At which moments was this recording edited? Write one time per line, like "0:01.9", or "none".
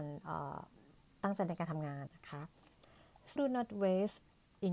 0:02.1
0:03.4